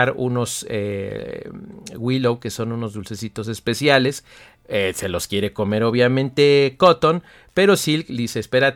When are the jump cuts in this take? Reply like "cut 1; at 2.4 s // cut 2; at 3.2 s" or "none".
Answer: none